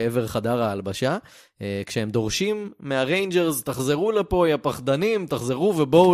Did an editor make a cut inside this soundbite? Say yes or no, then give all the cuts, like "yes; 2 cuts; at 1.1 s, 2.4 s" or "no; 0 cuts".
no; 0 cuts